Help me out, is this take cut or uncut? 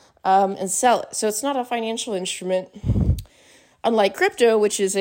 uncut